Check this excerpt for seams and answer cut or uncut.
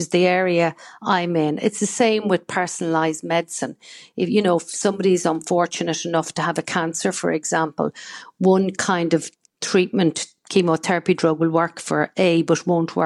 uncut